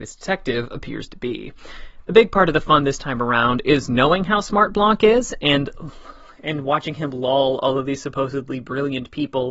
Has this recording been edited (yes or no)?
no